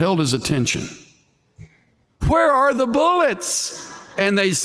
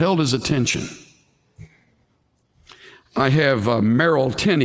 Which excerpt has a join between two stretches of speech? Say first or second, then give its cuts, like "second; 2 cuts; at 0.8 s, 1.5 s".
first; 1 cut; at 2.2 s